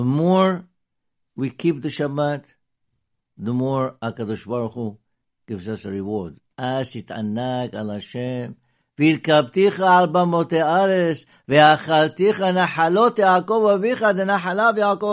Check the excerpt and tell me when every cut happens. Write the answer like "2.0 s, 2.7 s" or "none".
none